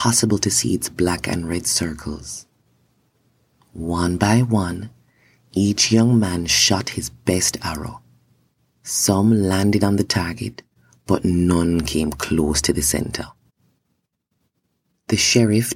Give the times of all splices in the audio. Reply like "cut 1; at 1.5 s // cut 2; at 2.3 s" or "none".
cut 1; at 8.7 s

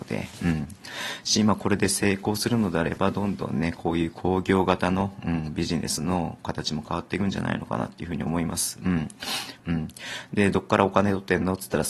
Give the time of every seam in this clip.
cut 1; at 9.6 s

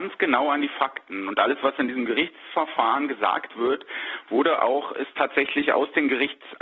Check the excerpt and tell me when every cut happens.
none

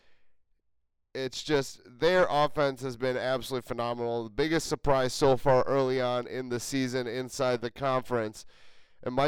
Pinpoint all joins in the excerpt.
none

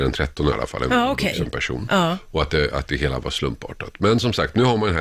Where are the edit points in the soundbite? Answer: none

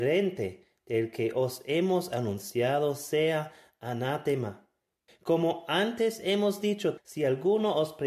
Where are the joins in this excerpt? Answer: cut 1; at 5.1 s // cut 2; at 7.0 s

